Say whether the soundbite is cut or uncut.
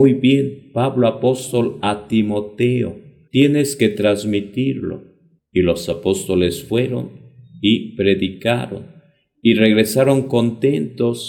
cut